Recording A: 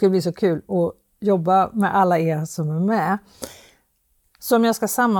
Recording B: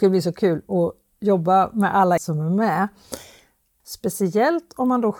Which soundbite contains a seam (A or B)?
B